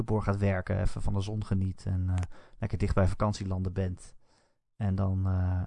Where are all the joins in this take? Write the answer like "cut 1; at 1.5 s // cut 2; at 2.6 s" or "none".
none